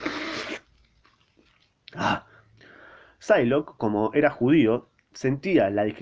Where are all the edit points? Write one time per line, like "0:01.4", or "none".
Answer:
none